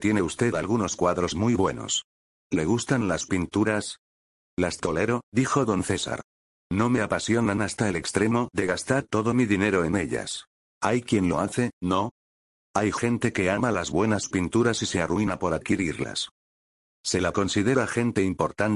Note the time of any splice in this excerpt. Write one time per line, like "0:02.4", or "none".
0:12.6